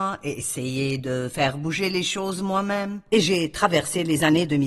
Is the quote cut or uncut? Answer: uncut